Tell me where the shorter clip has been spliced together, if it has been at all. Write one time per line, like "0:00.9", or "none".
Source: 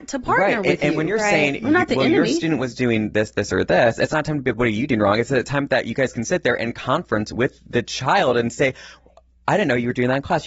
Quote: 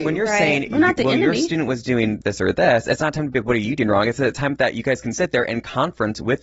0:02.2